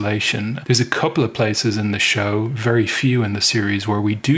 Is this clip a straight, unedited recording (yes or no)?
yes